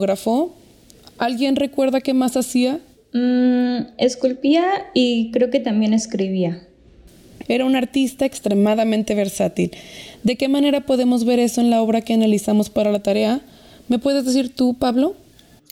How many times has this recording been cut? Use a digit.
1